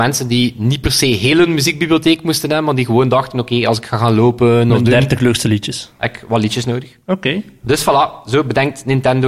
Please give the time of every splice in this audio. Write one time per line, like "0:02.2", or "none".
none

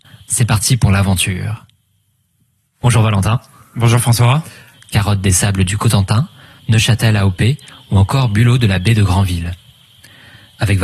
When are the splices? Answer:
0:04.7

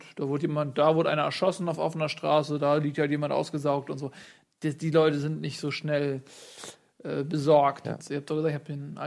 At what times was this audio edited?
0:07.8

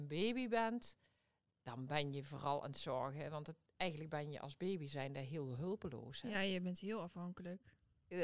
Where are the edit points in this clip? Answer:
none

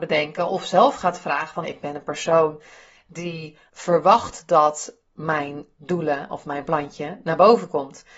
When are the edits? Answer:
0:01.6
0:03.7

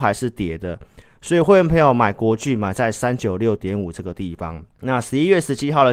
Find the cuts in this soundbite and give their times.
0:04.7

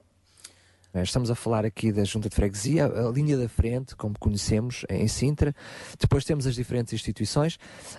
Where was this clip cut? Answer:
0:00.9

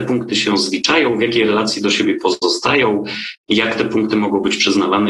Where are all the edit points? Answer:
none

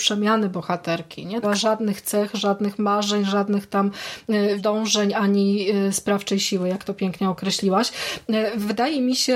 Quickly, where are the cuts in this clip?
0:01.4
0:04.6

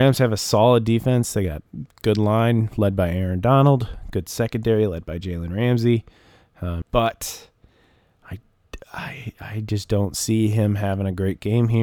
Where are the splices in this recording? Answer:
0:06.8

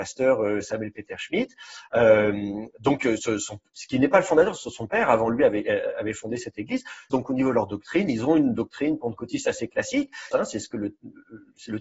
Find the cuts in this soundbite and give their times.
0:07.1
0:10.3

